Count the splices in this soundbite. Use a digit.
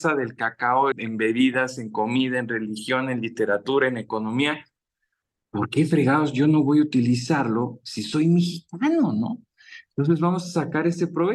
1